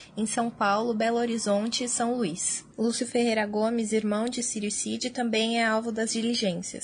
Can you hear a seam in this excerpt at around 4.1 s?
no; 1 cut; at 2.7 s

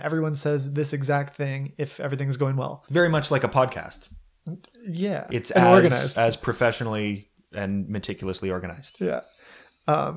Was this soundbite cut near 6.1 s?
yes; 2 cuts; at 2.8 s, 6.1 s

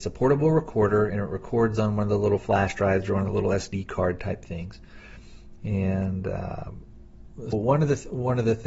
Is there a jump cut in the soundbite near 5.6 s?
yes; 2 cuts; at 5.6 s, 7.5 s

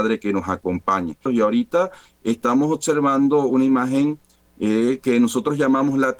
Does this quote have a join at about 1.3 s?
yes; 1 cut; at 1.3 s

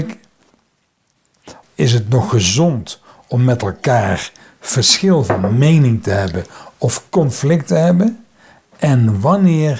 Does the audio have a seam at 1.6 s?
yes; 1 cut; at 1.6 s

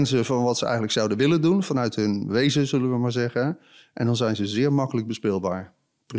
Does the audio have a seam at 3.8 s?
no; 0 cuts

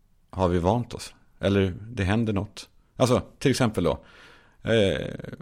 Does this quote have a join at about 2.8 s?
no; 0 cuts

